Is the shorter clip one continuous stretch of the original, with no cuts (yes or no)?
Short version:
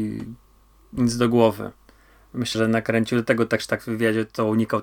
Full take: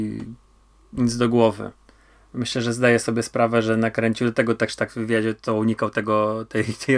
no